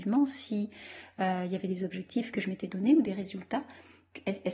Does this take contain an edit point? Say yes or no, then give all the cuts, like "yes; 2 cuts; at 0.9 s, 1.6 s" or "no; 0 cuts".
no; 0 cuts